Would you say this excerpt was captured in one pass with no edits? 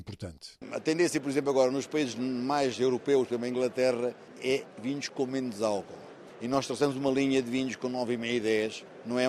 yes; 0 cuts

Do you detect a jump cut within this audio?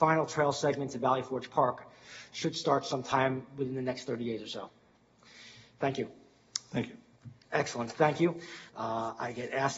yes; 2 cuts; at 7.4 s, 8.7 s

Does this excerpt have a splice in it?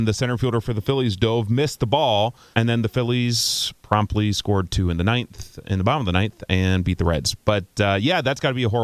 yes; 1 cut; at 2.5 s

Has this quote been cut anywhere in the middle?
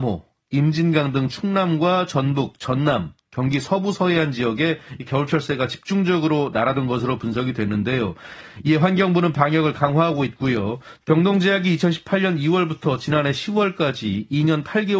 yes; 1 cut; at 11.0 s

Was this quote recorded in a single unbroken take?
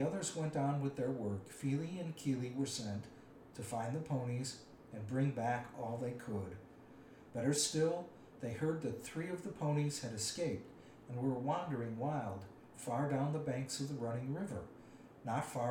no; 2 cuts; at 3.5 s, 7.3 s

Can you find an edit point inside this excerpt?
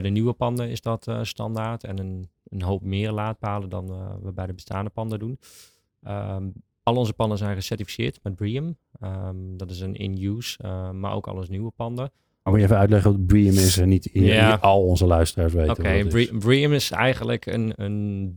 yes; 1 cut; at 12.5 s

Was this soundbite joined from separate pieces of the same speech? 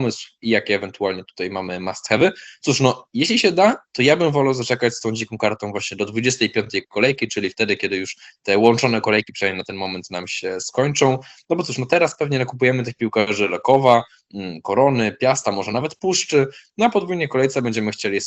no; 0 cuts

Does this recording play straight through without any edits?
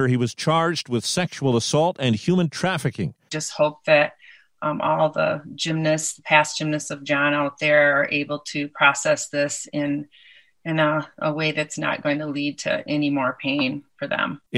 no; 1 cut; at 3.3 s

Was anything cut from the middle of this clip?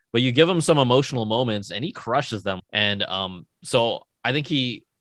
yes; 1 cut; at 2.6 s

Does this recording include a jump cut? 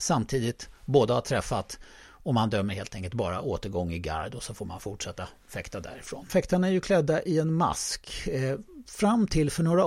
yes; 1 cut; at 6.3 s

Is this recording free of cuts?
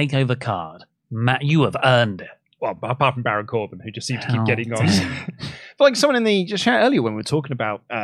yes; 0 cuts

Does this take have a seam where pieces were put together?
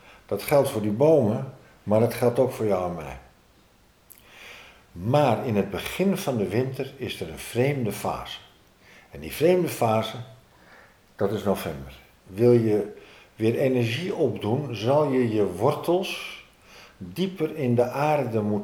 yes; 1 cut; at 12.2 s

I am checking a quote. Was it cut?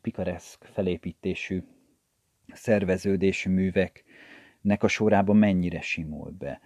no; 0 cuts

